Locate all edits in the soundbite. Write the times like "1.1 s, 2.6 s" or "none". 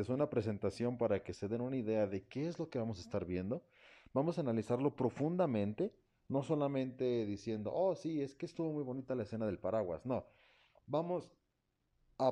none